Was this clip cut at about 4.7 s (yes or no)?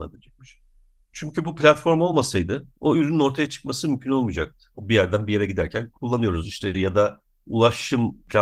yes